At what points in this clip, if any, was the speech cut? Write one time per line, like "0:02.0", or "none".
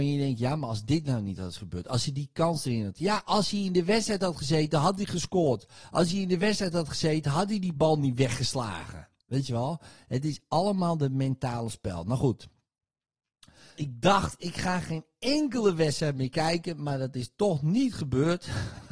0:13.8